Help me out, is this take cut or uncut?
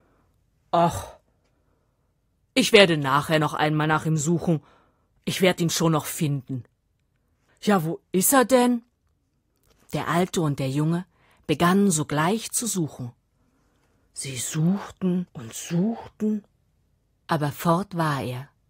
cut